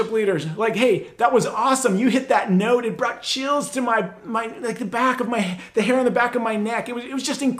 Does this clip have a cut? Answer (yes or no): no